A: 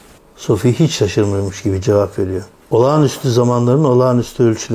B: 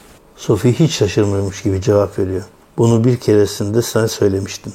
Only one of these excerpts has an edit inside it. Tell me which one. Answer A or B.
B